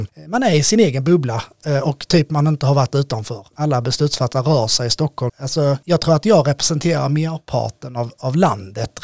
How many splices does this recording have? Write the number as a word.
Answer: two